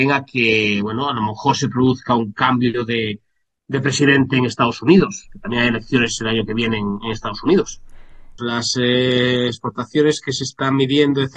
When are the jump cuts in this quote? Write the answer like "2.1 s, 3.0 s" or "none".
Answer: 8.4 s